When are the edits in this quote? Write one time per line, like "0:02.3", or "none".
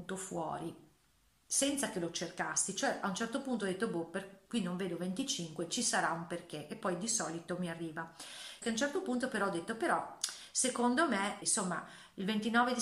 0:08.6
0:11.4

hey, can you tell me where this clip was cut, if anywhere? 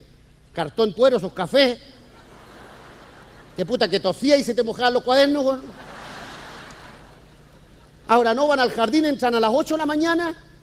0:00.9

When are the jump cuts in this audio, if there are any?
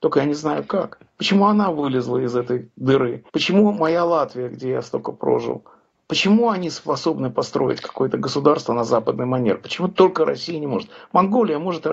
0:01.2
0:03.3

